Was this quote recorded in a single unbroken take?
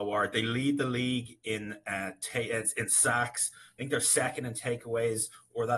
yes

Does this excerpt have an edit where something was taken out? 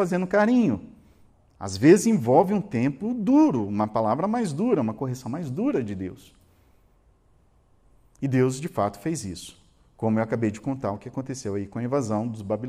no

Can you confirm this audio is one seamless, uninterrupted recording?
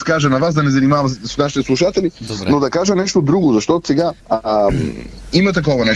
no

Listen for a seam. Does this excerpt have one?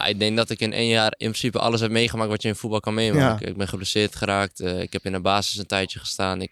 no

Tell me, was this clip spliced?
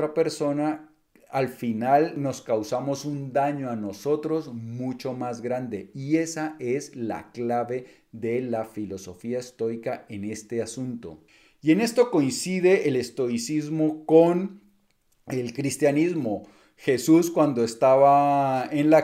no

